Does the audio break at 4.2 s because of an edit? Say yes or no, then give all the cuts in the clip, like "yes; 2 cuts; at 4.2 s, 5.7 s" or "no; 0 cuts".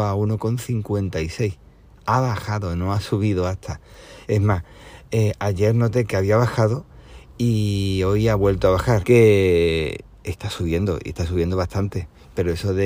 yes; 2 cuts; at 4.2 s, 9.0 s